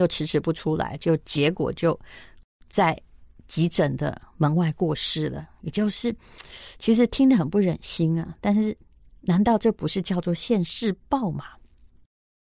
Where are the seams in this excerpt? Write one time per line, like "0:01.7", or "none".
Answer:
none